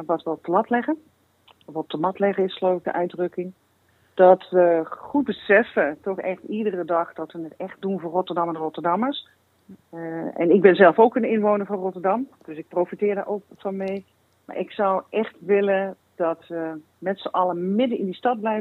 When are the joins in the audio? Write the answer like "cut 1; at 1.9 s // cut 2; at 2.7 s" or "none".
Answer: none